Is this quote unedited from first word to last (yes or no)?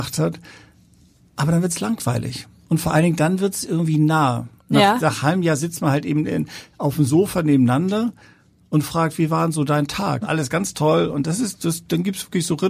no